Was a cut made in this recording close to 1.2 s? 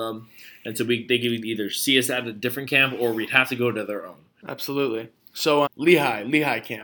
no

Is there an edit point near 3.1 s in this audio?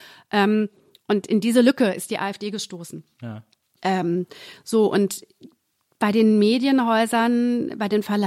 no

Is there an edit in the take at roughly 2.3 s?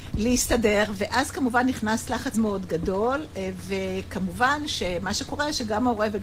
yes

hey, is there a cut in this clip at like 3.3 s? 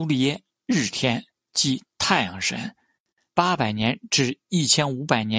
yes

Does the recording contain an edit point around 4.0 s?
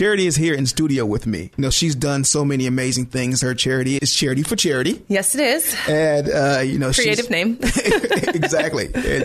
yes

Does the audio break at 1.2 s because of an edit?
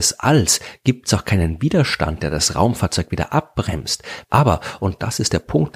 no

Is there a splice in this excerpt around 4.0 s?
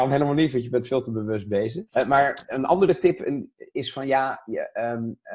no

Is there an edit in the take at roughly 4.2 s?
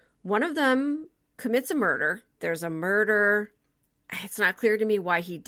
no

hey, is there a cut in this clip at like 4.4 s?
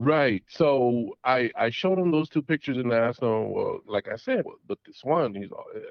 yes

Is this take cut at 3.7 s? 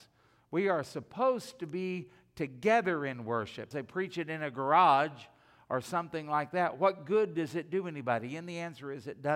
yes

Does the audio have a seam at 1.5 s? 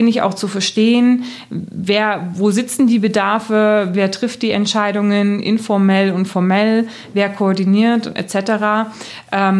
no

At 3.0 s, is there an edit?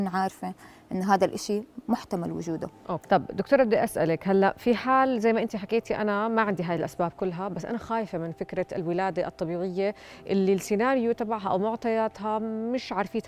yes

